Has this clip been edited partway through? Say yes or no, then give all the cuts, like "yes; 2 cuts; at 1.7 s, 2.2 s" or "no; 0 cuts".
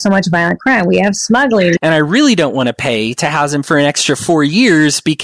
yes; 1 cut; at 1.8 s